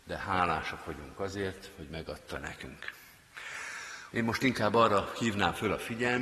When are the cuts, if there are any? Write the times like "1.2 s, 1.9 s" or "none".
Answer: 4.1 s